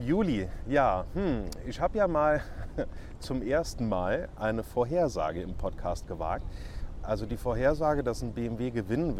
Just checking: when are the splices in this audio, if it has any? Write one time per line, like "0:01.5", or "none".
0:07.0

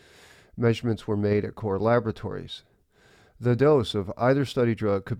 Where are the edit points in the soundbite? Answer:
none

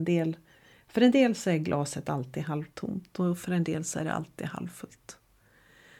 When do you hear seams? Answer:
none

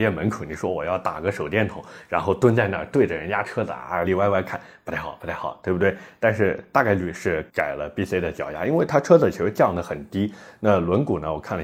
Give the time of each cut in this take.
0:04.0

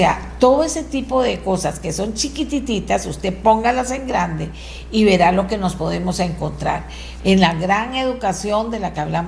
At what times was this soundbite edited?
0:07.2

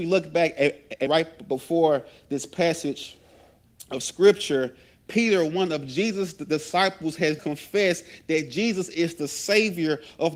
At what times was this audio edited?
0:01.1
0:07.4

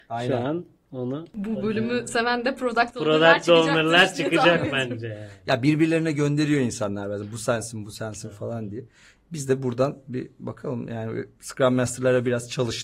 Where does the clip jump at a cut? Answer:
none

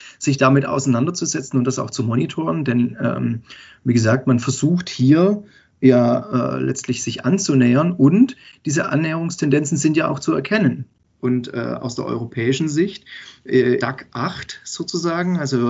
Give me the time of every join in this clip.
0:11.2
0:13.8

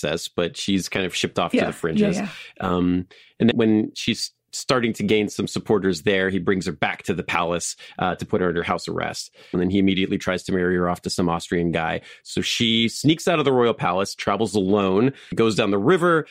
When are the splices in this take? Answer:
0:03.5
0:09.5

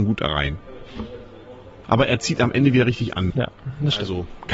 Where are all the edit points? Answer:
0:01.8
0:03.3

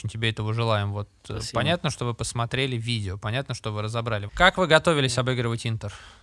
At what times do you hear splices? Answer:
0:04.3

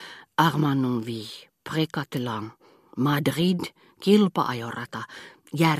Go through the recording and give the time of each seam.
none

